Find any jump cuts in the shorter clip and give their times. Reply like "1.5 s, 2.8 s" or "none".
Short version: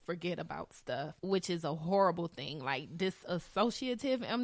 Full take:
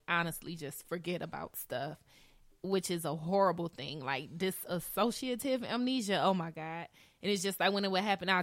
1.2 s